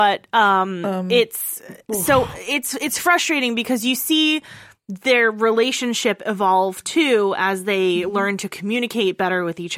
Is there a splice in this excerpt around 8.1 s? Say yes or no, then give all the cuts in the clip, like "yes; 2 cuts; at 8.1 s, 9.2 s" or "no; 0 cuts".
no; 0 cuts